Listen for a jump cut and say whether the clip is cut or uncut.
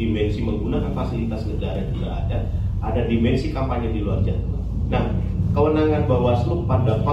uncut